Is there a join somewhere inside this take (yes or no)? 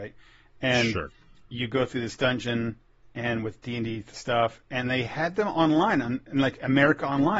no